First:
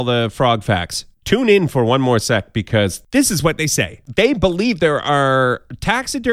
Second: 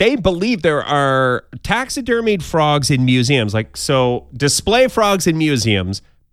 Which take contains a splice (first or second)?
first